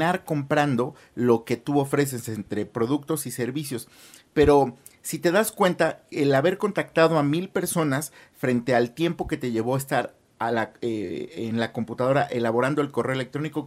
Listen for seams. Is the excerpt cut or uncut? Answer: uncut